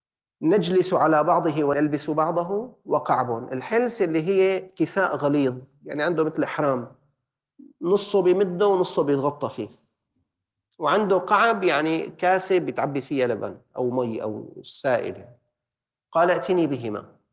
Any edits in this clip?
no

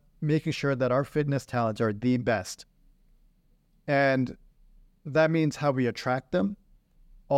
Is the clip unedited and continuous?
yes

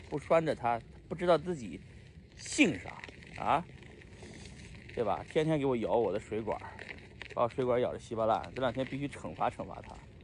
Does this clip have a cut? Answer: no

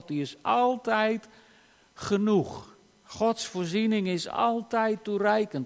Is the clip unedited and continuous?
yes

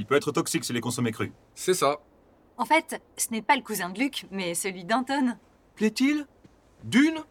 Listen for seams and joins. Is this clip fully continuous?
yes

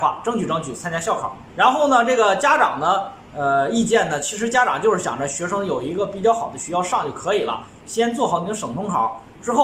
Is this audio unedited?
no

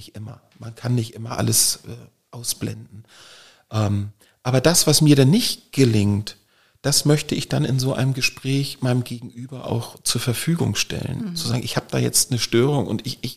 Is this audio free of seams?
yes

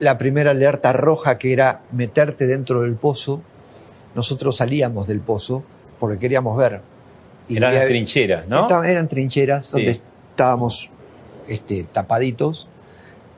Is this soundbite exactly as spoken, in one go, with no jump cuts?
yes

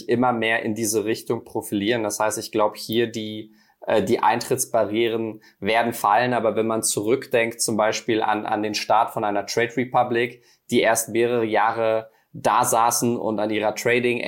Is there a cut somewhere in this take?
no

